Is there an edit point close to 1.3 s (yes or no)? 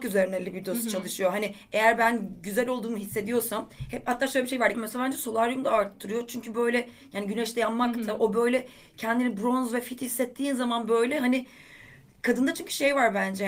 no